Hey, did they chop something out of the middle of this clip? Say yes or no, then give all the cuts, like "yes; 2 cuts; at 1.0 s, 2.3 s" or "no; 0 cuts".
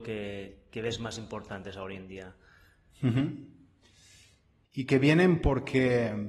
yes; 1 cut; at 4.6 s